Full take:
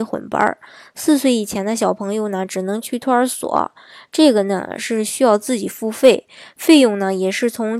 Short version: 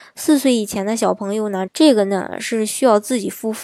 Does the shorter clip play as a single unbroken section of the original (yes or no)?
no